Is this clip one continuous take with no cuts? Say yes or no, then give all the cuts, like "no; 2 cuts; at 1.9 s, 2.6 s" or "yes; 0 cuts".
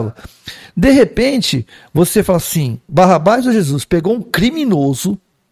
no; 1 cut; at 2.9 s